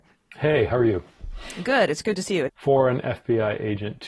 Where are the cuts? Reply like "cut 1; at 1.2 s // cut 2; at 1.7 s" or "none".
cut 1; at 2.5 s